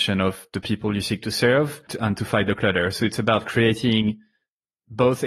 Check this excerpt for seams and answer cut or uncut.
uncut